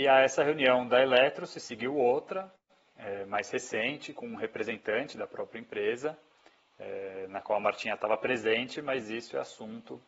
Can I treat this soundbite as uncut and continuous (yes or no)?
yes